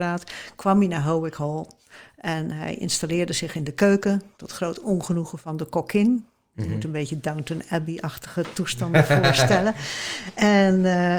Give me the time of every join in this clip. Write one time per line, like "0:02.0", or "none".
none